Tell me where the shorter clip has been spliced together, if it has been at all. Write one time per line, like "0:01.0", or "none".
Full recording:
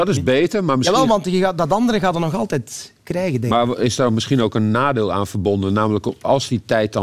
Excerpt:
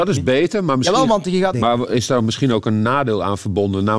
0:01.5